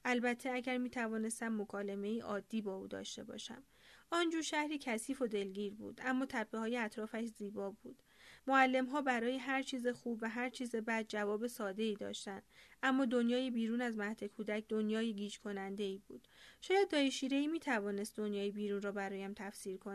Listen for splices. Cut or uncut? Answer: cut